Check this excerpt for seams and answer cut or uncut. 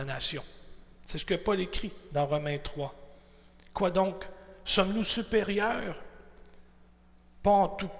uncut